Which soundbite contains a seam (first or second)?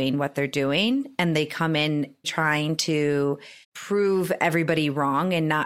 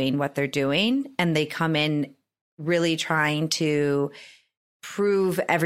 first